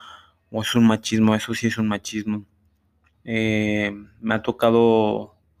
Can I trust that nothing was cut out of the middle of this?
no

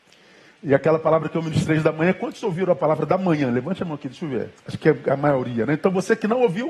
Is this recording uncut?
no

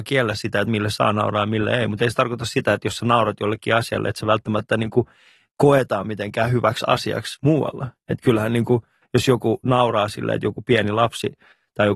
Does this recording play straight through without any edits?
yes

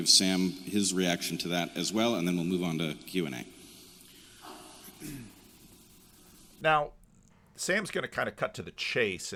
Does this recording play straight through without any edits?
yes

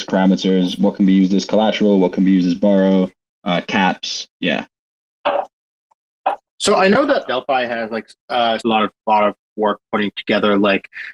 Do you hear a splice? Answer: yes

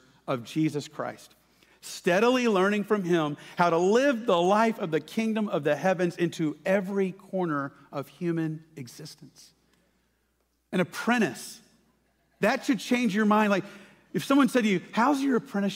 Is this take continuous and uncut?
yes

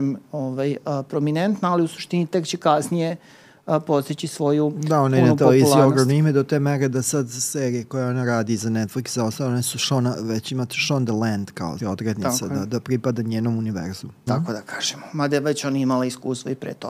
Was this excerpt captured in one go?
no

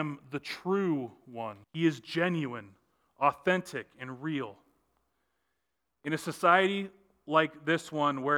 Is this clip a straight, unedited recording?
no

